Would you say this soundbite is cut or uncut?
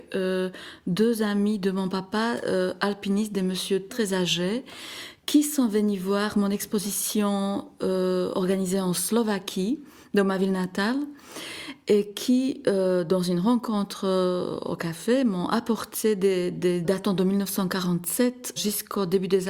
cut